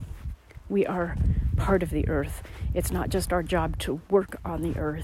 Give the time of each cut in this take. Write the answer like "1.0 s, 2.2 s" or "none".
none